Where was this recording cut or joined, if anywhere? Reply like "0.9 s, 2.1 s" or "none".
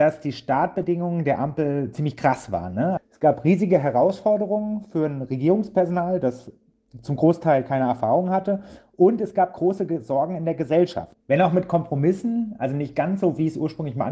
3.0 s, 11.1 s